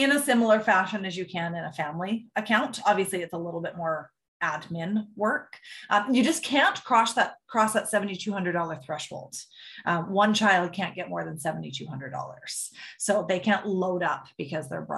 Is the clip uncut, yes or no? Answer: yes